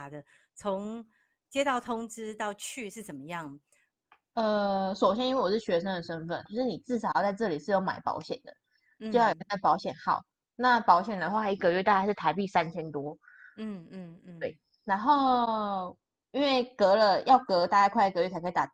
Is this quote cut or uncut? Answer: cut